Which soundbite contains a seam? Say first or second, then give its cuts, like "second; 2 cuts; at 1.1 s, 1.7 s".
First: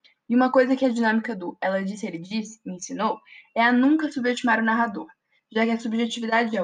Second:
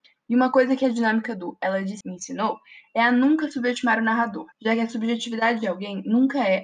second; 2 cuts; at 2.0 s, 4.5 s